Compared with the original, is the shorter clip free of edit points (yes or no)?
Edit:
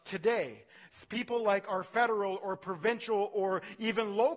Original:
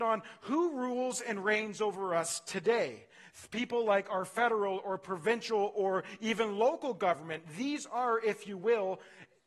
yes